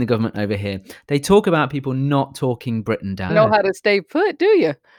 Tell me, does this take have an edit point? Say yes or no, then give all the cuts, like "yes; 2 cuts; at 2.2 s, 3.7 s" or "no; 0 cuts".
yes; 1 cut; at 3.3 s